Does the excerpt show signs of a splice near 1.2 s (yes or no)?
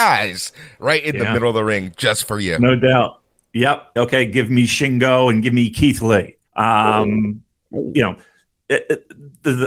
no